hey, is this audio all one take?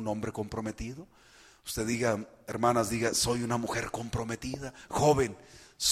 yes; 0 cuts

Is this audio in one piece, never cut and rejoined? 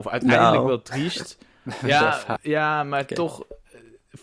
no; 1 cut; at 2.4 s

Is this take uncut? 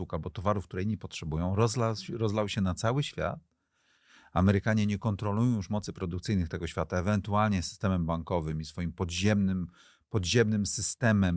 yes; 0 cuts

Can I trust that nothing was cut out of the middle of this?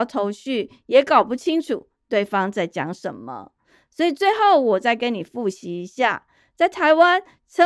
yes; 0 cuts

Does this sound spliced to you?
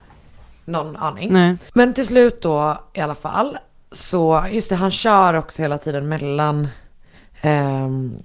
no; 0 cuts

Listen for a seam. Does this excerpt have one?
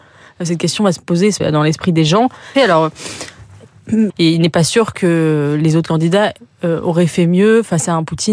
yes; 3 cuts; at 1.4 s, 2.5 s, 4.1 s

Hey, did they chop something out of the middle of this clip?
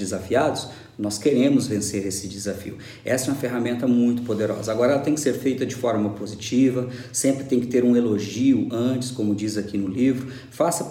no; 0 cuts

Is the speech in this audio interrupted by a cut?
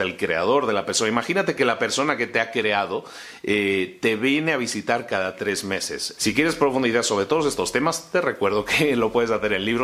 yes; 1 cut; at 6.2 s

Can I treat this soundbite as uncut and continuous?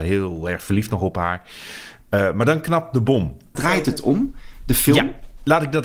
no; 1 cut; at 3.5 s

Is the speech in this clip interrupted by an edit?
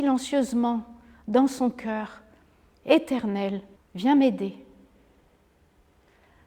yes; 1 cut; at 3.8 s

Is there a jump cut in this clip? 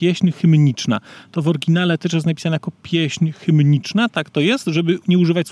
no; 0 cuts

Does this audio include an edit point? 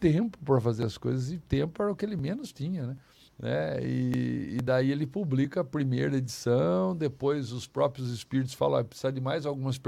yes; 1 cut; at 3.3 s

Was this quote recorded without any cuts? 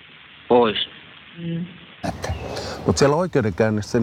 no; 1 cut; at 2.0 s

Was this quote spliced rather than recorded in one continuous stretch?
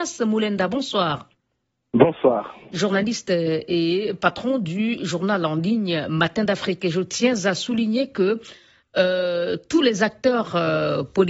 no; 0 cuts

